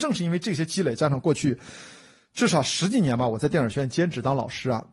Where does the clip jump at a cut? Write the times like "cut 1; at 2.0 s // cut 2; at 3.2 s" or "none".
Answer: none